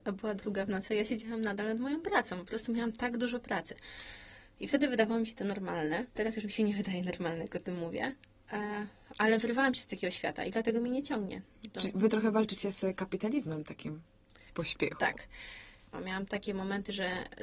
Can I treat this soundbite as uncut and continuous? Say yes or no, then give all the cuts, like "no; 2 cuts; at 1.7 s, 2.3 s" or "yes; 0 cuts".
no; 3 cuts; at 6.1 s, 14.5 s, 15.9 s